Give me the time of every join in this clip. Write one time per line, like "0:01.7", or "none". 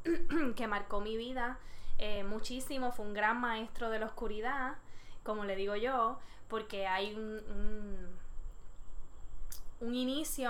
none